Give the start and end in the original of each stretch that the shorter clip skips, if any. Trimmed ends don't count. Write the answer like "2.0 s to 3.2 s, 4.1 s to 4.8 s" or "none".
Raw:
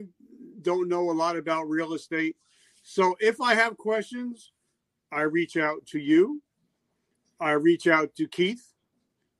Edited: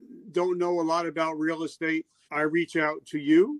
2.6 s to 5.1 s

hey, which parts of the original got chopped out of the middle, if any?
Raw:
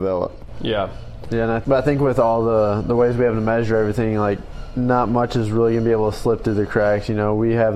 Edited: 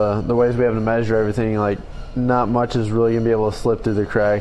none

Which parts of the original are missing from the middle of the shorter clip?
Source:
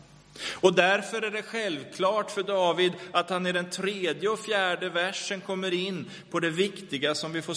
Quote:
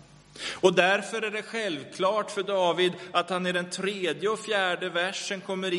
none

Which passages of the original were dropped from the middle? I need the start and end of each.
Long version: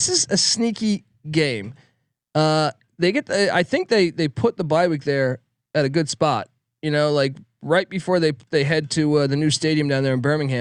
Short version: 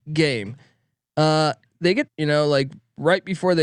3.2 s to 6.7 s

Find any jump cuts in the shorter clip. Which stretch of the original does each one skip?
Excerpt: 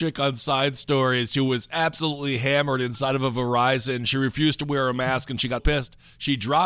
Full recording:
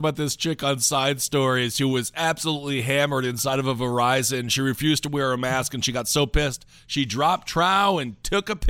6.0 s to 6.3 s

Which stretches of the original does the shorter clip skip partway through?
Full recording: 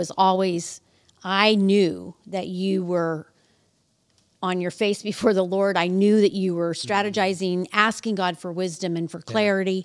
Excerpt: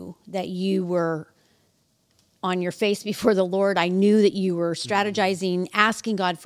none

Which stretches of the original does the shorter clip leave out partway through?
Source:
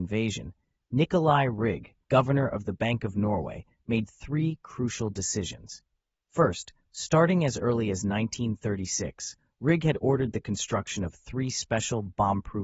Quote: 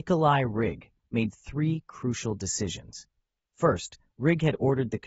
2.1 s to 3.8 s, 6.8 s to 9.5 s

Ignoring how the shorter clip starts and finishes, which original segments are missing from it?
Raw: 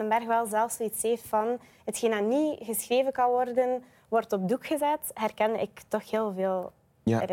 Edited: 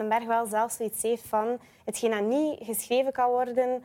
none

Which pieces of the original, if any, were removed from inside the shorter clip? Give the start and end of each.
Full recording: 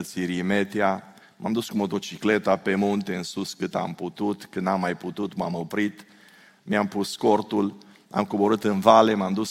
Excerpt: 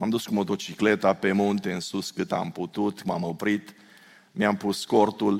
4.5 s to 5.3 s

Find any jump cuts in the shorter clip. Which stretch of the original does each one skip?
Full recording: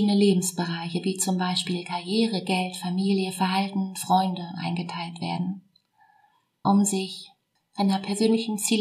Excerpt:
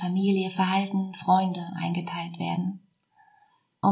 none

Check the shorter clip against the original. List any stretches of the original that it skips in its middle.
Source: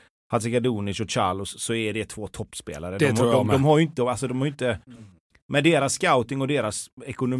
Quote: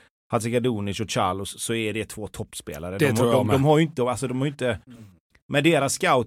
none

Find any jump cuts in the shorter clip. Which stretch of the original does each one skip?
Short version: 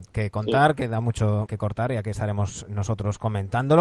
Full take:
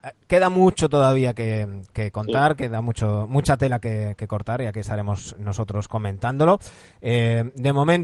3.3 s to 4.2 s

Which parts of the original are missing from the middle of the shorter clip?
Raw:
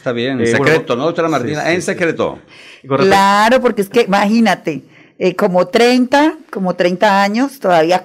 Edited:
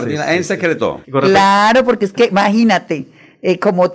2.4 s to 2.8 s

